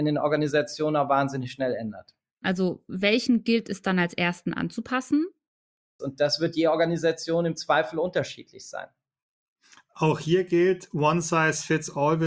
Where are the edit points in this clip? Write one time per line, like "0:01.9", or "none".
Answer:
0:02.4
0:06.0